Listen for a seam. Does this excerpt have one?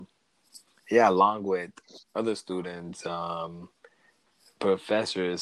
no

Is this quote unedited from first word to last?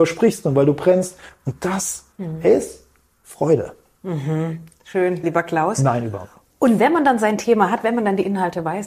no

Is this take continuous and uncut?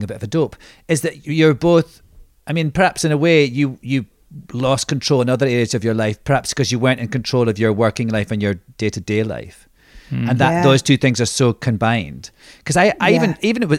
yes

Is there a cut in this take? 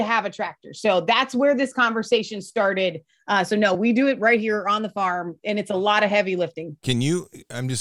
no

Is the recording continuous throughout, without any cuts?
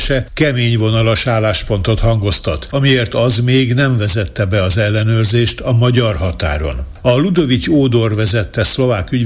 no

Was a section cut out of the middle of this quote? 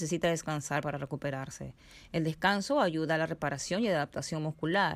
no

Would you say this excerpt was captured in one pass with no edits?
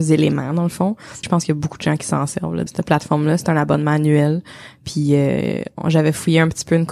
no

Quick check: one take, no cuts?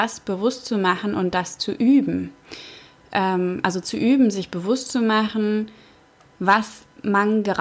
yes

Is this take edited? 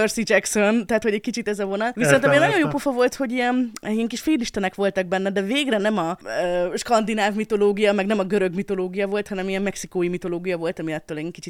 no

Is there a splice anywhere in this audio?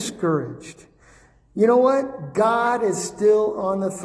no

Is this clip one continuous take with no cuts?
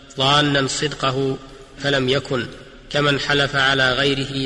no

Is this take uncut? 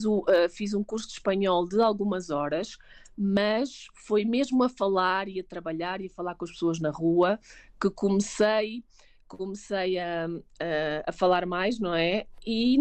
yes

